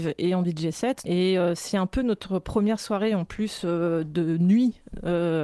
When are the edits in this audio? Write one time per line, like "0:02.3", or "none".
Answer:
0:01.0